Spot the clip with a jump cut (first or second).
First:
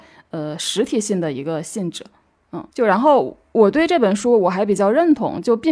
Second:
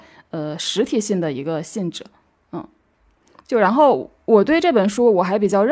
first